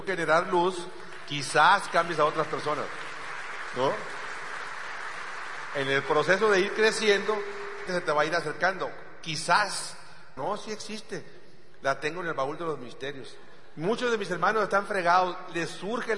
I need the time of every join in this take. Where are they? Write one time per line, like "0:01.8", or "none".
0:07.9
0:10.4